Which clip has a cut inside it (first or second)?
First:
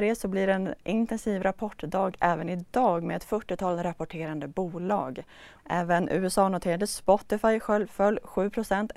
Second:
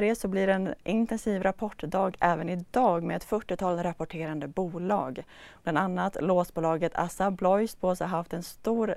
first